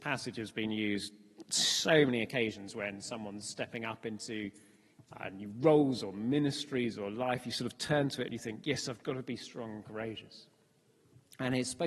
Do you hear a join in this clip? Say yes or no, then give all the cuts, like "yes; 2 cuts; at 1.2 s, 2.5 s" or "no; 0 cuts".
no; 0 cuts